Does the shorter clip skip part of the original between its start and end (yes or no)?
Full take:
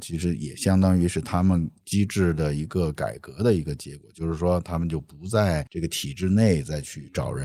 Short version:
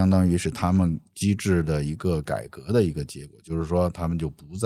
no